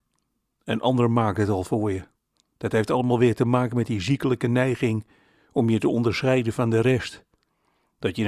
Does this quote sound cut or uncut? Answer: uncut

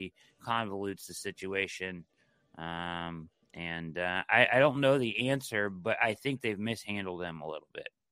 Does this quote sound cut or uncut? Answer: uncut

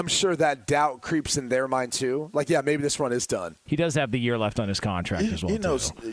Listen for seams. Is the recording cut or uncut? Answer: cut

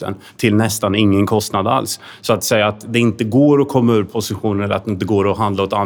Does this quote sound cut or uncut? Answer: uncut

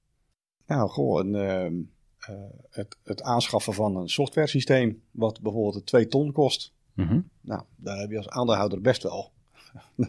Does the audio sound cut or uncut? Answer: uncut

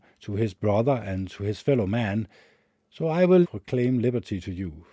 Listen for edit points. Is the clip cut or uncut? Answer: cut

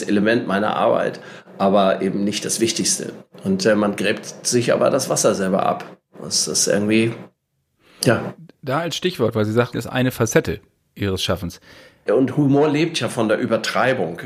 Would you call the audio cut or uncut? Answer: cut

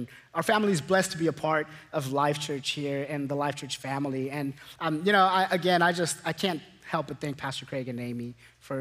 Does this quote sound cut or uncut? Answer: uncut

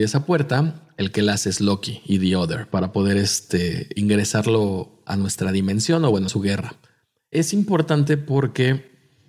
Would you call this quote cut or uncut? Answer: cut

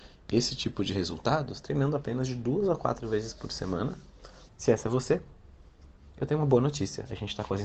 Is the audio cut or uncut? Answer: cut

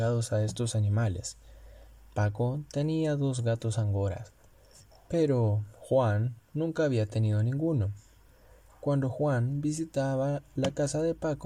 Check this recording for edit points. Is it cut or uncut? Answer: uncut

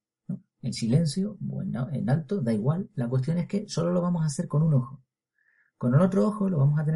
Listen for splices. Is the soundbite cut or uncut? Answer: uncut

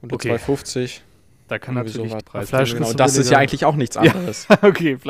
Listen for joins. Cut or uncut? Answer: cut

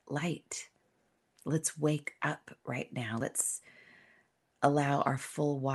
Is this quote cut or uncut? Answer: uncut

